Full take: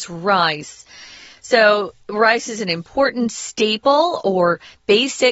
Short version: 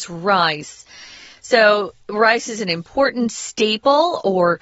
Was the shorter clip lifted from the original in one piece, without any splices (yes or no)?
yes